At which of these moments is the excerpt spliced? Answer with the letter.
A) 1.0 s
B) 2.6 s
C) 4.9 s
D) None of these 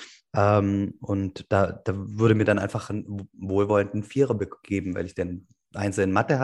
D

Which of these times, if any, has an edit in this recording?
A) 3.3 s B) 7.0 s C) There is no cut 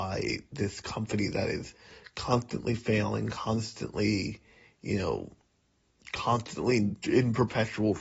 B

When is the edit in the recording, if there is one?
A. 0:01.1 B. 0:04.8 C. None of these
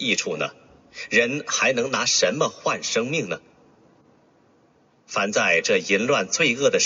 C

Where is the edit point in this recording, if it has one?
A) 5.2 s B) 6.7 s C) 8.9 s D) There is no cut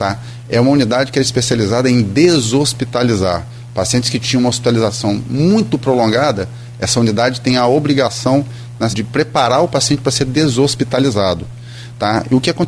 C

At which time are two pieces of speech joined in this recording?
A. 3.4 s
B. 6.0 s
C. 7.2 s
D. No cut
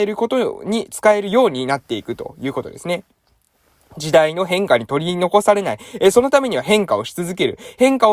D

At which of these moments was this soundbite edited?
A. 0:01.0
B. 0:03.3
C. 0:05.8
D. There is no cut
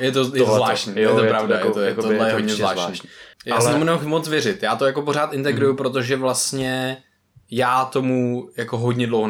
B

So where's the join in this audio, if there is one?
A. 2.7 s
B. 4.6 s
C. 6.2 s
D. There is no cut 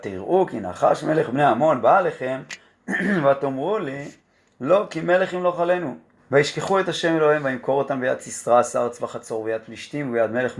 C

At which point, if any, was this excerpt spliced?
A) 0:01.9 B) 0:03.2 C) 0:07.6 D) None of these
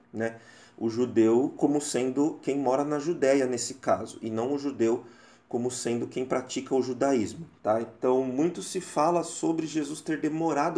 C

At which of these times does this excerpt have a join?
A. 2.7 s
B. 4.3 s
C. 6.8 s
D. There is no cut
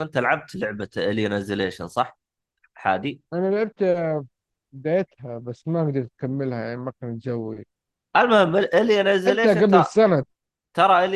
C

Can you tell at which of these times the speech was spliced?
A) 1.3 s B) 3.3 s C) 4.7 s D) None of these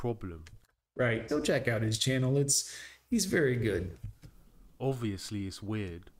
A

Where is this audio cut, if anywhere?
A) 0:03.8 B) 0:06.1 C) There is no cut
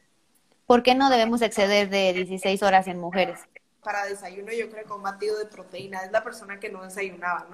A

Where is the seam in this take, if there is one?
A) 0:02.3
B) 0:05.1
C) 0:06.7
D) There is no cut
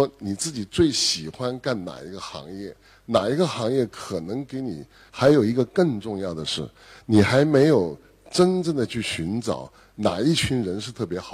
B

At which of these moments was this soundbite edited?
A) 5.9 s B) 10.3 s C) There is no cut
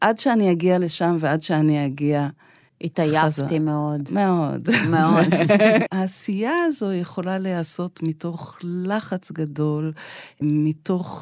A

